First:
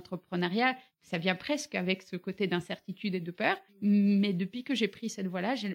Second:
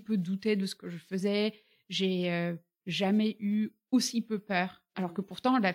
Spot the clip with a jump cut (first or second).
first